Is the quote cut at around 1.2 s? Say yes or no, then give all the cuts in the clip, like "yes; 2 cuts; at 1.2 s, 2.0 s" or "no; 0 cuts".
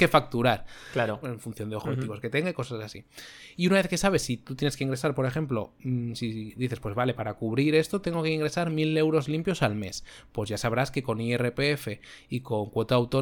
yes; 1 cut; at 1.2 s